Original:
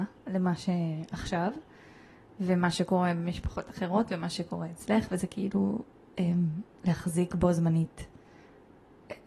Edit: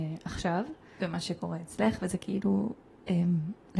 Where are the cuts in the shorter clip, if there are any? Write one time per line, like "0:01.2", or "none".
0:01.0